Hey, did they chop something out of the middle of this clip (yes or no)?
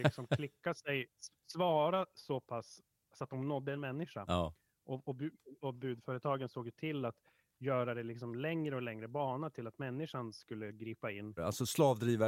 yes